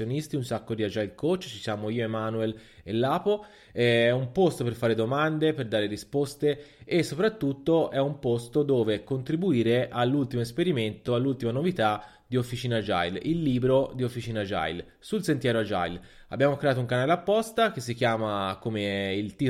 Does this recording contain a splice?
no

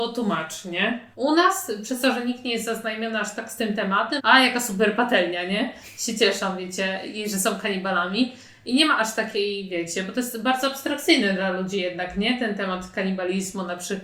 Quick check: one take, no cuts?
no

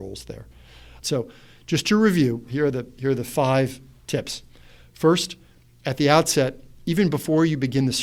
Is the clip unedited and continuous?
no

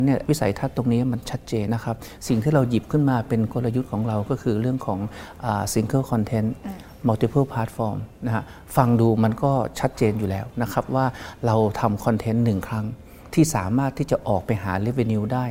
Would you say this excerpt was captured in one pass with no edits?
no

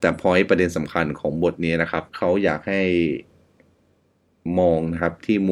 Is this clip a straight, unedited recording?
no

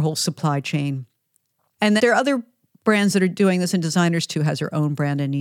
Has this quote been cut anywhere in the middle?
yes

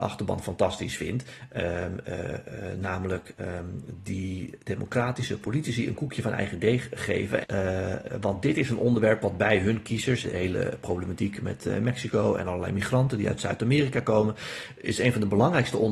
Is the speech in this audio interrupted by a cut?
yes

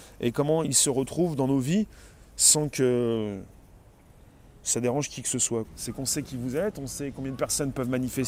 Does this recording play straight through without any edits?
no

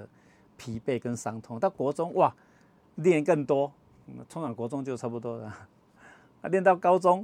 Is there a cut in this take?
no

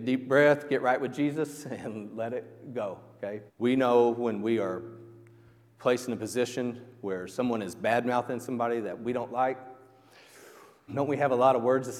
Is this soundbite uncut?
no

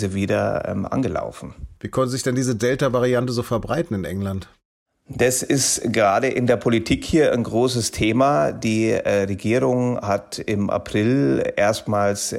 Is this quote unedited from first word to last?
no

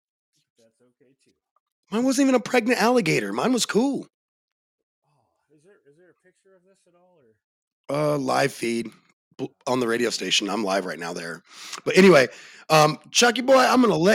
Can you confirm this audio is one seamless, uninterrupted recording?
yes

